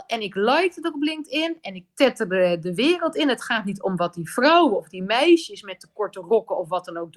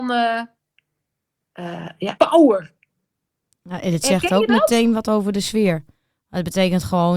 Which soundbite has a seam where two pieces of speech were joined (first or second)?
second